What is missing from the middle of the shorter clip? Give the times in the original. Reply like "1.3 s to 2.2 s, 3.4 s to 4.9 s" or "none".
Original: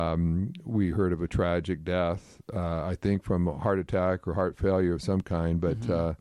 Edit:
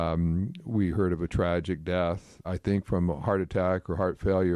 2.4 s to 2.8 s